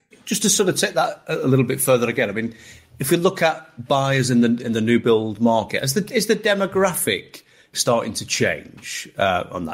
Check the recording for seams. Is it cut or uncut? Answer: cut